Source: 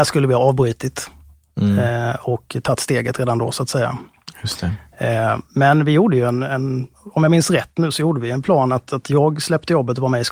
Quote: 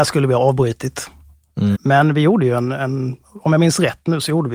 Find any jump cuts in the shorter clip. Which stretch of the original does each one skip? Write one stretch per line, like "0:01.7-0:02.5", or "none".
0:01.7-0:05.5